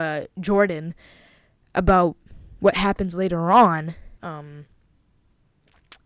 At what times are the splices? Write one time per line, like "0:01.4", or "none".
0:04.2